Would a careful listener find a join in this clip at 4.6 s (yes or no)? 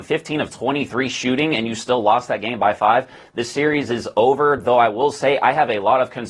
no